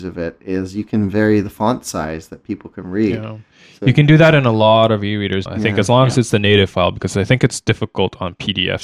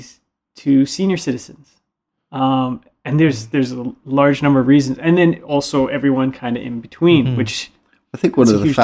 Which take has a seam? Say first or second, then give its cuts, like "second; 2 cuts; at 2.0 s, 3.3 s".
first; 1 cut; at 5.5 s